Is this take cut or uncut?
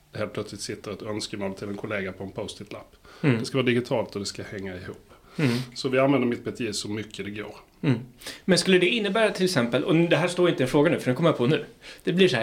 uncut